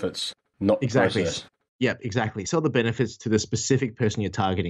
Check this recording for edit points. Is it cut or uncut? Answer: uncut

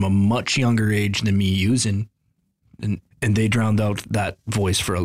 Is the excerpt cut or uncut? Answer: cut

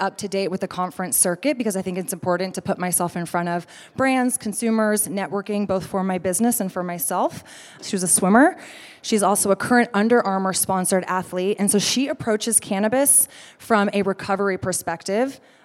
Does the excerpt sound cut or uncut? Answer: cut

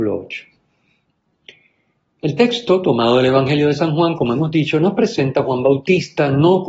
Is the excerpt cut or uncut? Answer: uncut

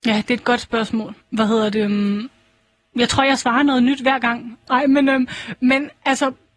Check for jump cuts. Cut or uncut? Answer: cut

